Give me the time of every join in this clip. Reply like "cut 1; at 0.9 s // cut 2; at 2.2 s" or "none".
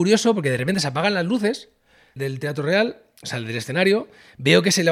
cut 1; at 2.2 s

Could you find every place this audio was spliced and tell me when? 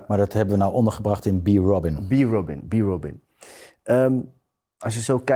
none

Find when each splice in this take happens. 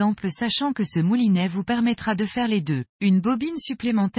cut 1; at 2.9 s

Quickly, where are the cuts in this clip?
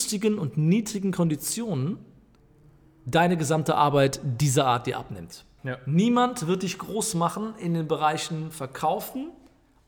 cut 1; at 5.6 s

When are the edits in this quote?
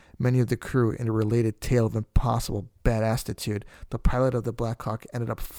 none

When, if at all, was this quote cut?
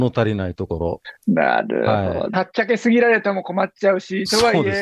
cut 1; at 2.3 s

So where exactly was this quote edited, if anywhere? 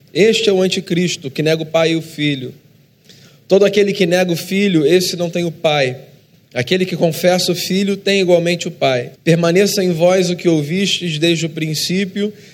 cut 1; at 9.2 s

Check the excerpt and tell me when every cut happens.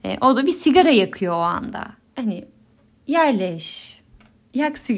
cut 1; at 2.0 s

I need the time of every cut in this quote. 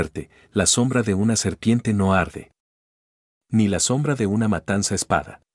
none

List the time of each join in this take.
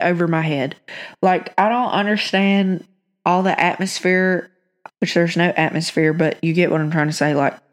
cut 1; at 4.9 s

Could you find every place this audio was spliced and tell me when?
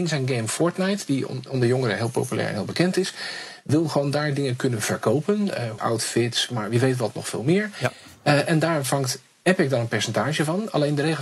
cut 1; at 5.8 s

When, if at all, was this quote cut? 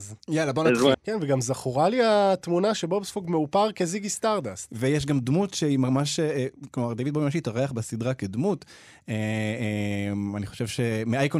cut 1; at 0.9 s

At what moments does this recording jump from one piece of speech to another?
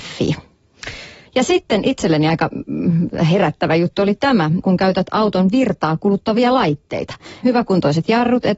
cut 1; at 1.3 s // cut 2; at 4.6 s // cut 3; at 7.4 s

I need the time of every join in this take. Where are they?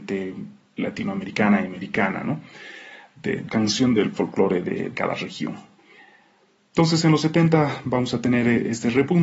none

